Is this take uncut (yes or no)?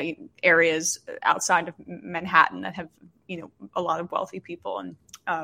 yes